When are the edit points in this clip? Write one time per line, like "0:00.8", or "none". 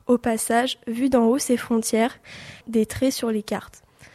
0:02.6